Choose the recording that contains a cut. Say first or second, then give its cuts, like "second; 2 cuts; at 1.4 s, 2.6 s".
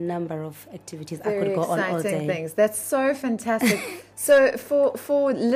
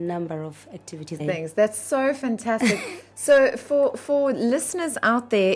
second; 1 cut; at 1.2 s